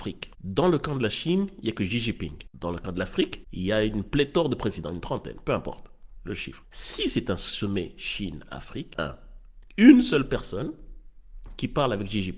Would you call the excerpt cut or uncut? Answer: cut